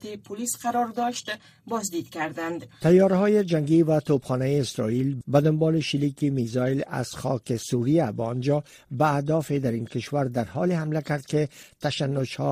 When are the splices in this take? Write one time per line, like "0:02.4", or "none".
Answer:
0:02.8

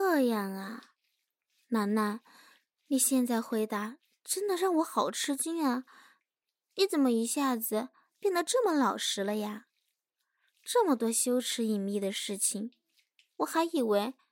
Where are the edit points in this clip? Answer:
none

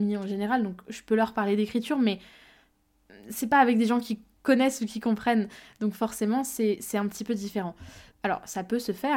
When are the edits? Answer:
0:08.1

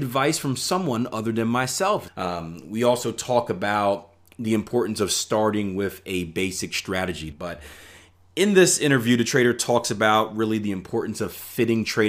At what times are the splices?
0:02.1
0:07.3

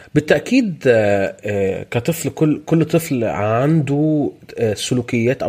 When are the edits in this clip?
none

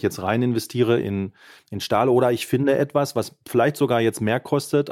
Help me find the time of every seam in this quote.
0:01.0

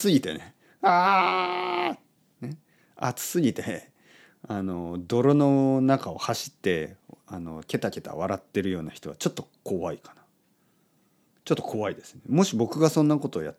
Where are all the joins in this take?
none

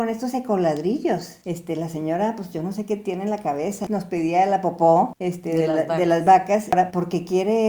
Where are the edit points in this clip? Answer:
none

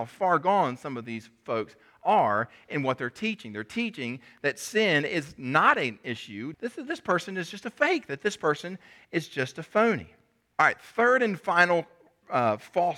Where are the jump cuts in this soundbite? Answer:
0:06.5
0:10.5

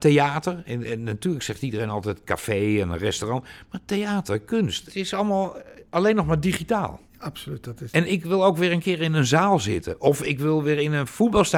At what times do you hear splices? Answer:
none

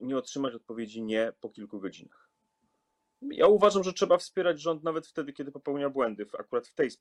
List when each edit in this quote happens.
0:03.1

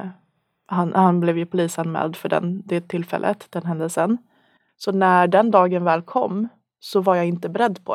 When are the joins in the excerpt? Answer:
0:04.7

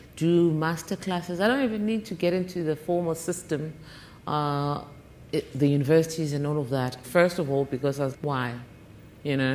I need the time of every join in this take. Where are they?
0:07.0
0:08.1

